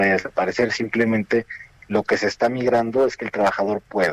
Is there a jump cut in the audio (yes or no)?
no